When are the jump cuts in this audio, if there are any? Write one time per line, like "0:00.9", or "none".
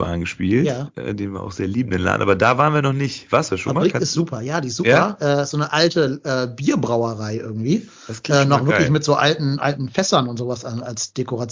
none